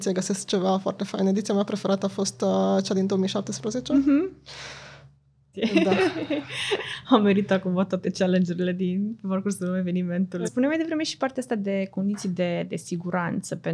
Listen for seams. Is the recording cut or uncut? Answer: cut